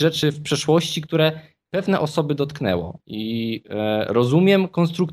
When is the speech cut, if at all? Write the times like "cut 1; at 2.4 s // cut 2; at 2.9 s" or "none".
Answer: cut 1; at 3.0 s